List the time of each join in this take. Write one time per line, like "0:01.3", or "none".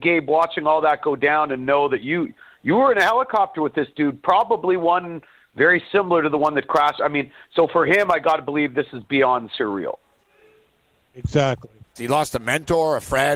0:12.0